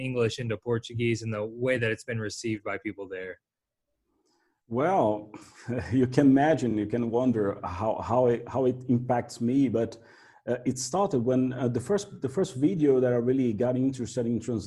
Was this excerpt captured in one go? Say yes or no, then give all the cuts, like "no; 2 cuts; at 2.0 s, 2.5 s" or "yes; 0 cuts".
yes; 0 cuts